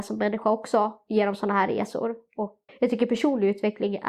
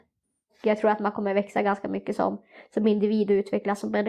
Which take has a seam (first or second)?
first